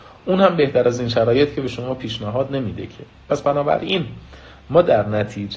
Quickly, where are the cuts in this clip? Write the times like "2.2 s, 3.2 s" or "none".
none